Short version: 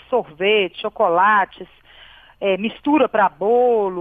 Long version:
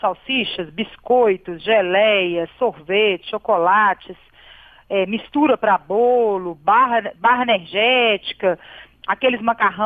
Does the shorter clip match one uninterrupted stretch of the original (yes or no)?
yes